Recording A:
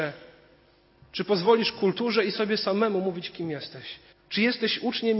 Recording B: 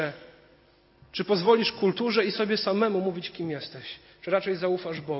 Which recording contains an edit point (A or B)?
A